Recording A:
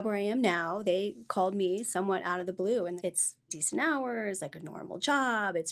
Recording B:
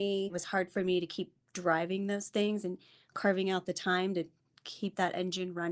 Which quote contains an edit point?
A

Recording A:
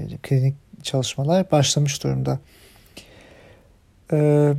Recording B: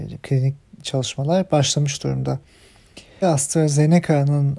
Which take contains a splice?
B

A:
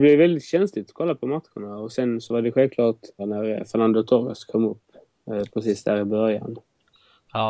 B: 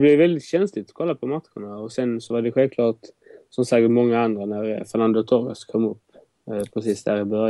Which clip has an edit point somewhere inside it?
A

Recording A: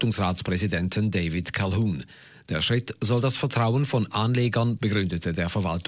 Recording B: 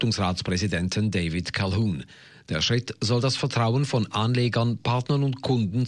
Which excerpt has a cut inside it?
A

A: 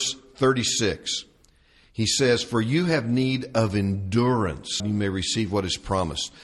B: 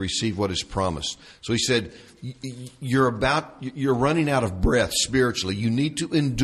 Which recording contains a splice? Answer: A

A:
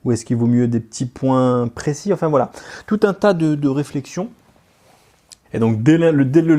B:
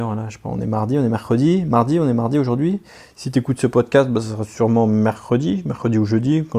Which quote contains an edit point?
A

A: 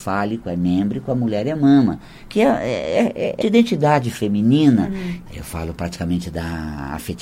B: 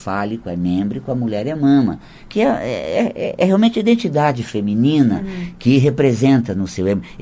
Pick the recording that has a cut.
A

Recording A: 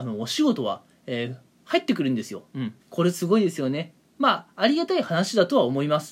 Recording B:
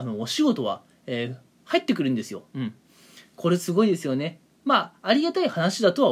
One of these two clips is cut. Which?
A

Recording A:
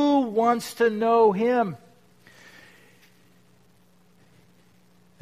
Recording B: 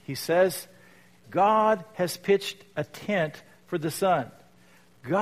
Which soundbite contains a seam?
B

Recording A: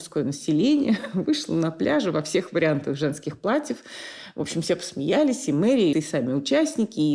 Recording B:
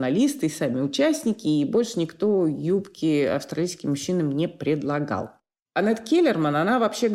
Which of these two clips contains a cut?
A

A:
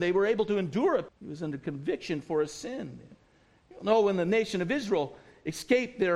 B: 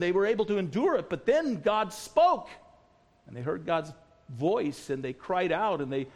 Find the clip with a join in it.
A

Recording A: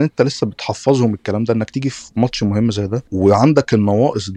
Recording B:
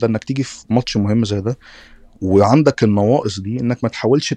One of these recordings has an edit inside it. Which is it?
A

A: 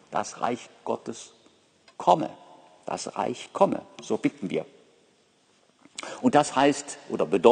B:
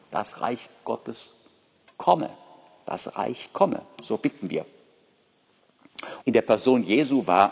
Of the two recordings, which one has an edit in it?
B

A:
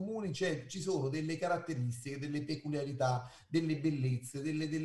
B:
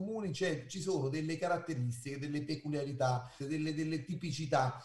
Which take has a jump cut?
B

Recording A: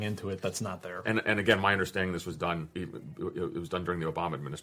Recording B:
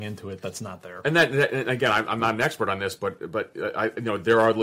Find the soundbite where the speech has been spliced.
A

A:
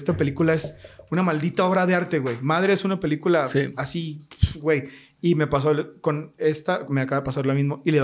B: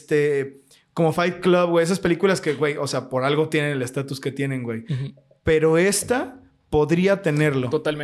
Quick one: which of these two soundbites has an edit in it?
A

